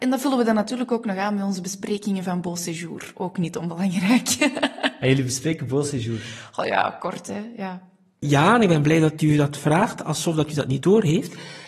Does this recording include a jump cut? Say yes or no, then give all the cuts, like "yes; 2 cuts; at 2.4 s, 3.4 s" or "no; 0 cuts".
yes; 1 cut; at 8.2 s